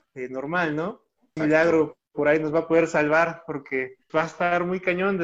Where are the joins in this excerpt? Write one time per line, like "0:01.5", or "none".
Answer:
0:01.4
0:04.1